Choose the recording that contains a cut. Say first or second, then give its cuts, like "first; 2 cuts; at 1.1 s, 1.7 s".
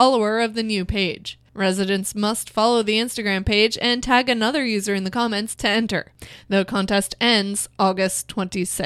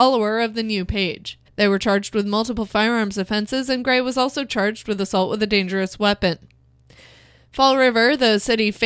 second; 1 cut; at 1.5 s